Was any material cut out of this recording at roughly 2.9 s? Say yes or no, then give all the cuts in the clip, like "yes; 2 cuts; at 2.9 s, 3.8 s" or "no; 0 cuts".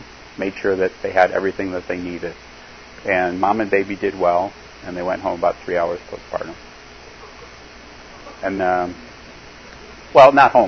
no; 1 cut; at 8.6 s